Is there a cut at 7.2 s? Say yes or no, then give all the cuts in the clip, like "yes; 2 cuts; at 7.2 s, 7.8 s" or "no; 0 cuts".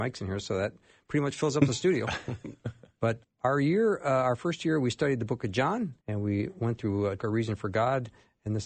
yes; 3 cuts; at 3.2 s, 6.0 s, 7.2 s